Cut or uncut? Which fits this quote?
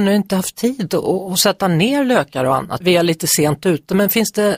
cut